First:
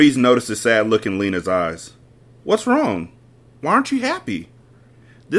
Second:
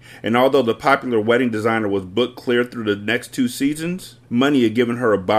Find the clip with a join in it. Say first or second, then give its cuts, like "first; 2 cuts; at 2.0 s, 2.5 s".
second; 1 cut; at 4.2 s